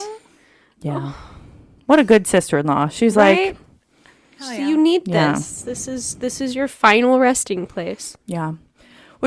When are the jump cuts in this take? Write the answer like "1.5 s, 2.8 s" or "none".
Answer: none